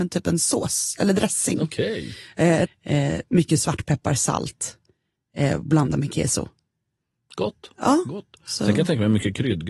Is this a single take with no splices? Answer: no; 1 cut; at 2.7 s

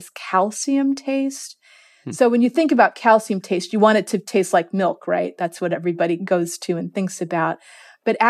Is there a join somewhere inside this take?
no; 0 cuts

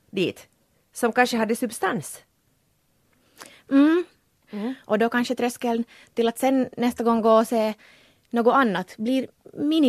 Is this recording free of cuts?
no; 1 cut; at 4.4 s

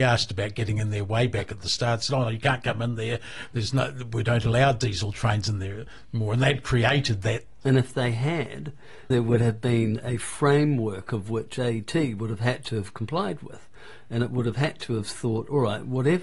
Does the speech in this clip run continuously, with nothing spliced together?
no; 2 cuts; at 7.6 s, 9.1 s

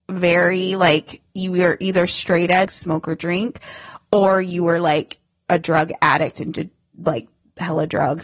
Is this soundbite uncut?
no; 1 cut; at 2.7 s

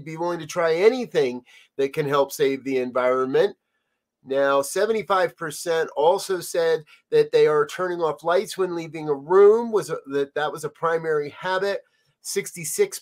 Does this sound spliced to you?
no; 0 cuts

